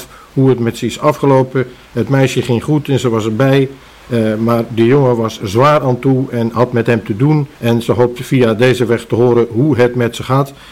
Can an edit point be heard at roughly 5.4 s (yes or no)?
yes